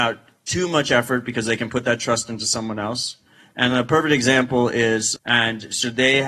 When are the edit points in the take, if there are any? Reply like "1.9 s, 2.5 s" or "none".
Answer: 5.2 s